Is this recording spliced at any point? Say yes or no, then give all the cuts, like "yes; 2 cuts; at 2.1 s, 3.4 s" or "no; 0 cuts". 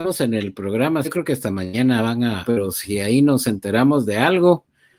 yes; 2 cuts; at 1.0 s, 2.4 s